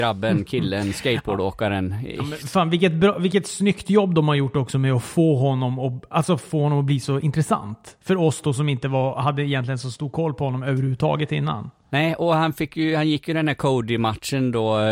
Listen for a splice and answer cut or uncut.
uncut